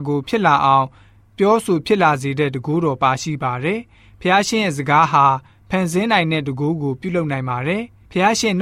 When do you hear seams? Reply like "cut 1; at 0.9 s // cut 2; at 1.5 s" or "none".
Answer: none